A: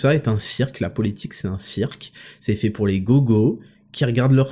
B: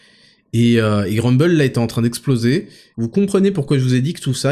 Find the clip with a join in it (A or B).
B